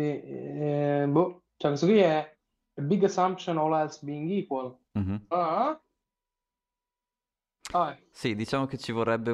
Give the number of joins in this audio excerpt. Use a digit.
1